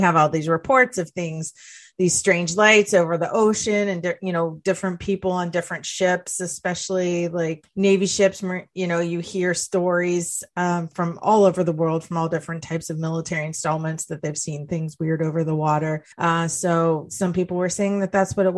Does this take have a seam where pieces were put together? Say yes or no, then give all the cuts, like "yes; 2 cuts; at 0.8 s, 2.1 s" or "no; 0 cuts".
yes; 2 cuts; at 7.6 s, 16.1 s